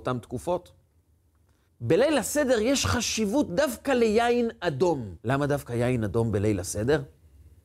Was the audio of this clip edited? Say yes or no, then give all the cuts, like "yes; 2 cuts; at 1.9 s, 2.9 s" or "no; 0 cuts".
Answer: yes; 2 cuts; at 1.7 s, 5.2 s